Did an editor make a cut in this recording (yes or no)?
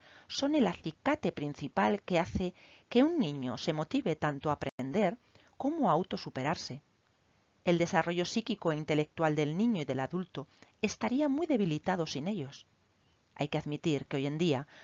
no